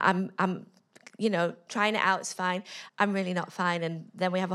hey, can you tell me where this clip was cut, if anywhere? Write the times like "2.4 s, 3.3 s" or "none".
2.9 s